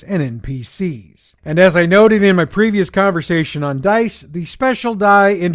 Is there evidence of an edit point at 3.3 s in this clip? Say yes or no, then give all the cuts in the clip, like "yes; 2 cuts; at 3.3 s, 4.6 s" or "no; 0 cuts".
no; 1 cut; at 1.4 s